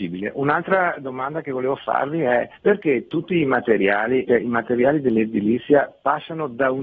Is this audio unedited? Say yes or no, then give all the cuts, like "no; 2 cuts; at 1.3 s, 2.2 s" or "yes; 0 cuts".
no; 2 cuts; at 2.6 s, 4.3 s